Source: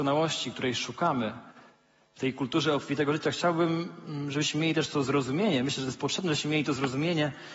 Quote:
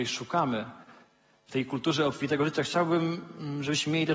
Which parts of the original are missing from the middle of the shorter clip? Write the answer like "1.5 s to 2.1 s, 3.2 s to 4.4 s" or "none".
none